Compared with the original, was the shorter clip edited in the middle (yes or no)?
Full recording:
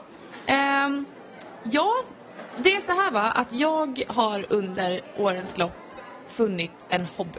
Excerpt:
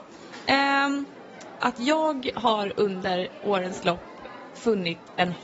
yes